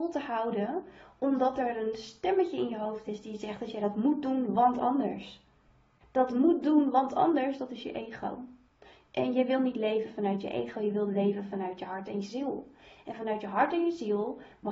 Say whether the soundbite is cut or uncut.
uncut